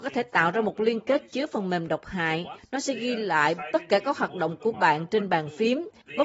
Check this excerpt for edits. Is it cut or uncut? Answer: cut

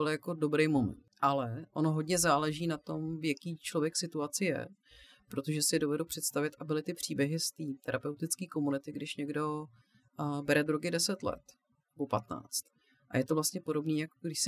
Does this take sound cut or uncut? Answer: uncut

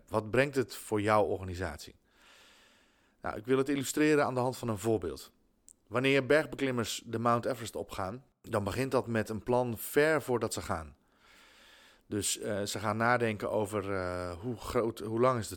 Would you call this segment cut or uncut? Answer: uncut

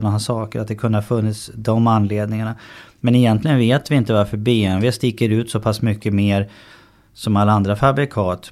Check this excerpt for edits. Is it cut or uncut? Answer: uncut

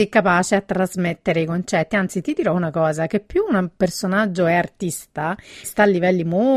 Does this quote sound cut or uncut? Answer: cut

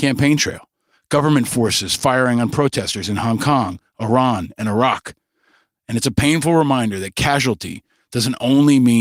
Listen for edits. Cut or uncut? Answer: cut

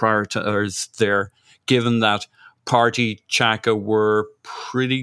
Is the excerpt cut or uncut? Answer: uncut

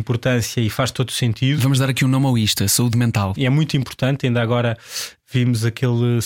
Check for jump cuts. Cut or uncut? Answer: cut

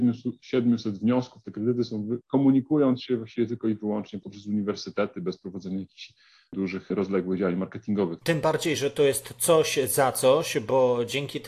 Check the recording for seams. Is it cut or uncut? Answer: cut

